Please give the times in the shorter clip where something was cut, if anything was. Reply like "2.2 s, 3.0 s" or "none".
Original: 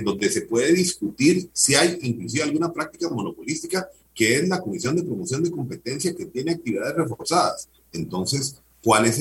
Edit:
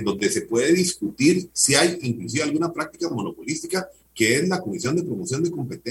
none